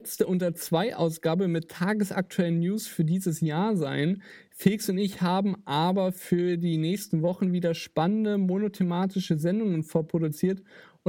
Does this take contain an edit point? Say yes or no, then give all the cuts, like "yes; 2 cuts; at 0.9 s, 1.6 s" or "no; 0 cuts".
no; 0 cuts